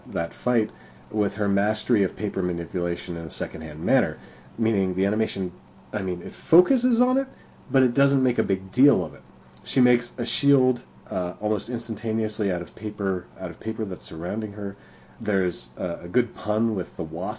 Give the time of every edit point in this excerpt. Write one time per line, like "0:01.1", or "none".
0:13.3